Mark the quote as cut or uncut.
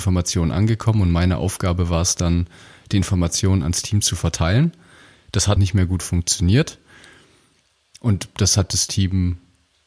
cut